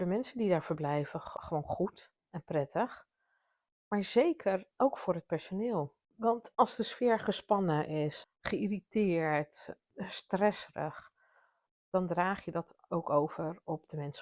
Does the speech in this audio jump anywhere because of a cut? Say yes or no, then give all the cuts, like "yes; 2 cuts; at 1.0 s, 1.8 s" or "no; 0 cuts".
yes; 2 cuts; at 6.0 s, 8.2 s